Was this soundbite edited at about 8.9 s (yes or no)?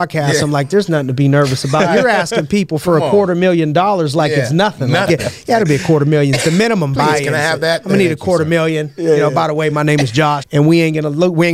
no